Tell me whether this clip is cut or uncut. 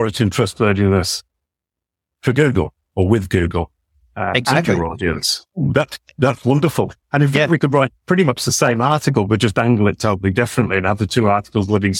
uncut